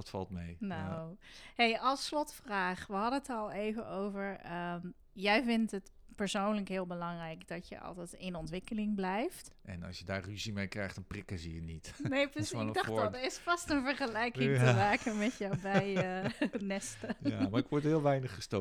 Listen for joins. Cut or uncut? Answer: cut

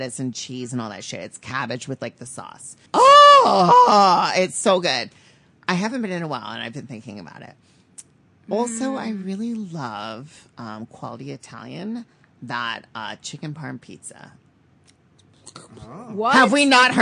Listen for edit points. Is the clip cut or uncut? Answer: cut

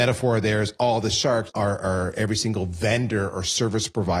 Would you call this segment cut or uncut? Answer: cut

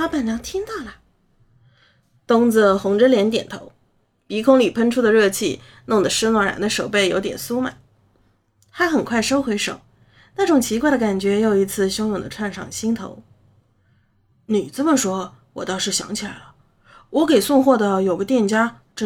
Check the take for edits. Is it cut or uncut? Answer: uncut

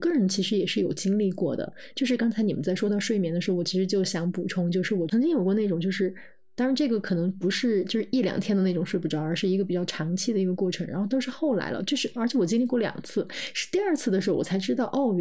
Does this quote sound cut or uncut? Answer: cut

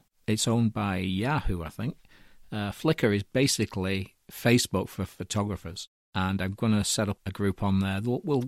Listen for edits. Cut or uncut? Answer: uncut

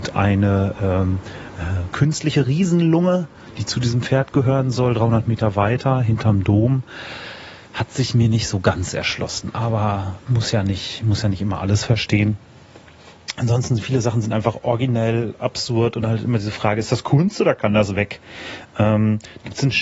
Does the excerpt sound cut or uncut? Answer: uncut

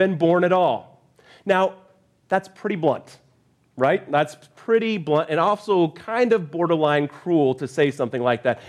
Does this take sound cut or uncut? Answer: uncut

